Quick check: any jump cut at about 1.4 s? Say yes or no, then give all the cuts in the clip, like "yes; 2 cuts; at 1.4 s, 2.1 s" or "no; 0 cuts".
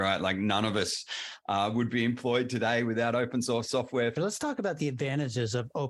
no; 1 cut; at 4.2 s